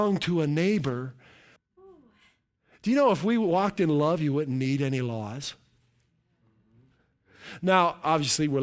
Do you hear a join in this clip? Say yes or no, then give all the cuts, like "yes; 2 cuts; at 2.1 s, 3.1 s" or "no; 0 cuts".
yes; 1 cut; at 1.6 s